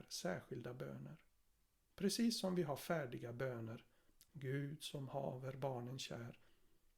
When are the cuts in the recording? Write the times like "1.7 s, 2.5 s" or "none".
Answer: 1.9 s, 4.3 s